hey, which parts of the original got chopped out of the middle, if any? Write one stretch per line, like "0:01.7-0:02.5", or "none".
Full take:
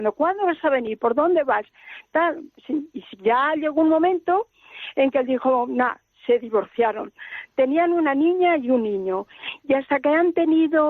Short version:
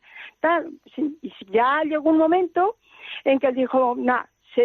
none